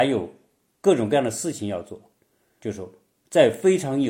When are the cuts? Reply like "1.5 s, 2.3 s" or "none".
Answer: 2.6 s